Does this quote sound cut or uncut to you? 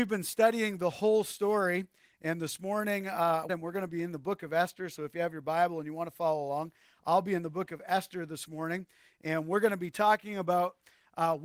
cut